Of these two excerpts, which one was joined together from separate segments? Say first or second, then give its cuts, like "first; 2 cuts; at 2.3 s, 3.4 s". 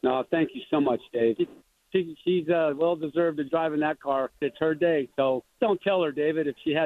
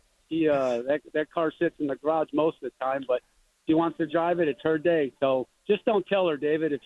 first; 3 cuts; at 1.4 s, 4.4 s, 5.6 s